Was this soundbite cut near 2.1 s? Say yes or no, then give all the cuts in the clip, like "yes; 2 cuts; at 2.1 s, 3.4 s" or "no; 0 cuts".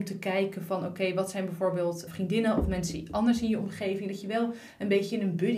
yes; 1 cut; at 2.1 s